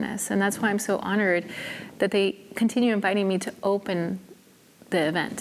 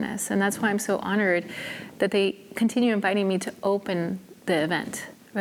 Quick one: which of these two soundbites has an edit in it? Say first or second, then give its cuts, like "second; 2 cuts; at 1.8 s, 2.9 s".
second; 1 cut; at 4.4 s